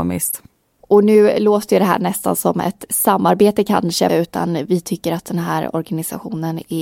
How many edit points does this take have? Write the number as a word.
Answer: one